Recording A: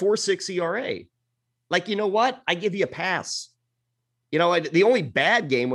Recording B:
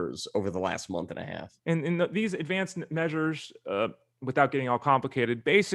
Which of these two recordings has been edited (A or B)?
B